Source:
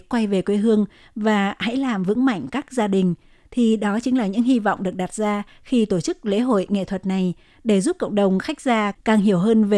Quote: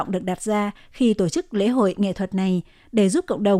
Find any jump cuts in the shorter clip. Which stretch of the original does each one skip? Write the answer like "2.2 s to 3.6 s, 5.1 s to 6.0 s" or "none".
none